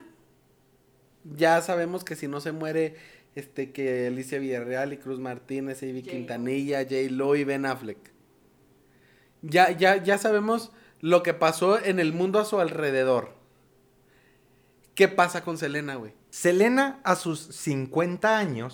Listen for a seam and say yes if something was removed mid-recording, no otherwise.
no